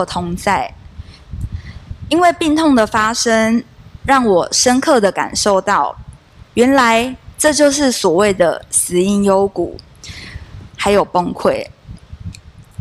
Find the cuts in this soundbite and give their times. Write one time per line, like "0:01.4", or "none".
0:01.2
0:10.7